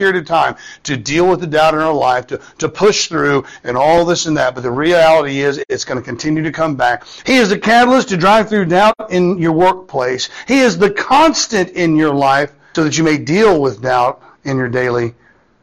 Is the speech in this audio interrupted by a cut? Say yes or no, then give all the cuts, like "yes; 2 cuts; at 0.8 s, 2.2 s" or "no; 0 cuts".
yes; 2 cuts; at 7.2 s, 12.7 s